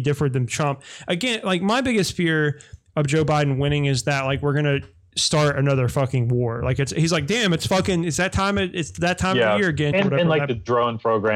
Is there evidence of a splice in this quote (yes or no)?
yes